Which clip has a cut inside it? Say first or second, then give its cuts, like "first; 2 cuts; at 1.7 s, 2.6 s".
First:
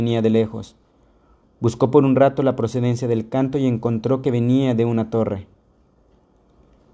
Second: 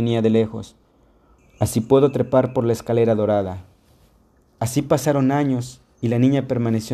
second; 1 cut; at 1.4 s